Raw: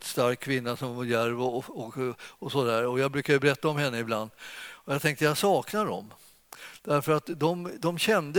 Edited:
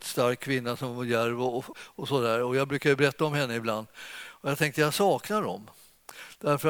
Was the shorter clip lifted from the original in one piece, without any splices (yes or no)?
no